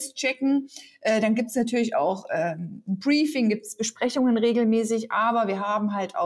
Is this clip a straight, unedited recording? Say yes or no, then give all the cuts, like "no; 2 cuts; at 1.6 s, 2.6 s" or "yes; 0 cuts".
yes; 0 cuts